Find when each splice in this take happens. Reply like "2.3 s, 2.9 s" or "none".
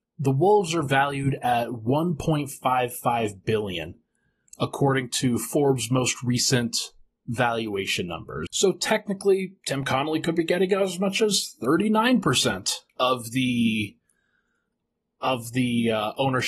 8.5 s, 12.9 s